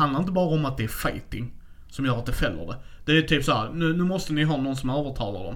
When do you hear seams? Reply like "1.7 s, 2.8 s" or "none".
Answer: none